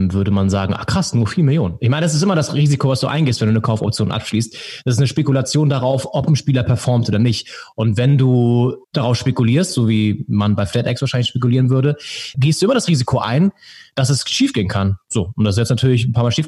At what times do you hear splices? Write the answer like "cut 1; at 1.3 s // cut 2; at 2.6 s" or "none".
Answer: cut 1; at 8.8 s // cut 2; at 12.3 s